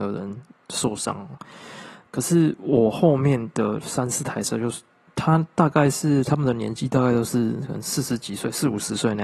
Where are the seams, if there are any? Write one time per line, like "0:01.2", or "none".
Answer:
0:02.0